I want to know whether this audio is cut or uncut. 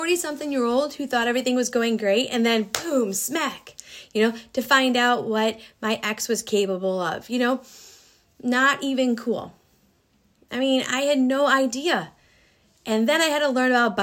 uncut